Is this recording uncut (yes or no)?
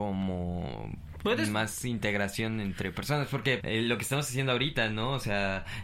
no